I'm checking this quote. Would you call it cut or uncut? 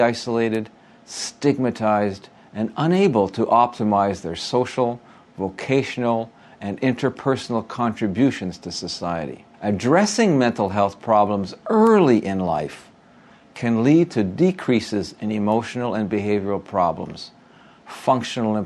cut